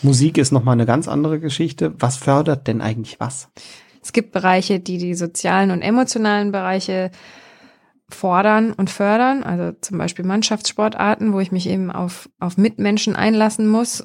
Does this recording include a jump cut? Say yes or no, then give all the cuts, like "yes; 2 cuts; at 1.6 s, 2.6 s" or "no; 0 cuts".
no; 0 cuts